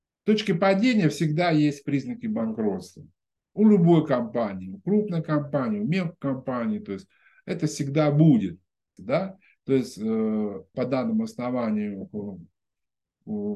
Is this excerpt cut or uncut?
cut